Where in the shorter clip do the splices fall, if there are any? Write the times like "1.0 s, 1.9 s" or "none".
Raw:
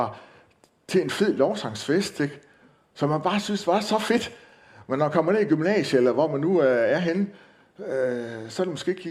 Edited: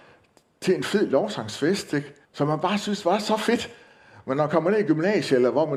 2.2 s